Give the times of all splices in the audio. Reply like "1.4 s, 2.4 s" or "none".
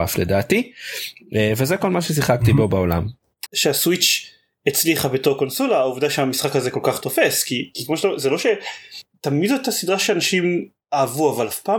3.5 s